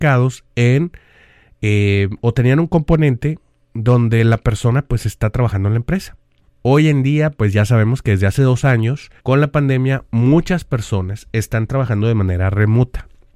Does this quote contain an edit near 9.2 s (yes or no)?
yes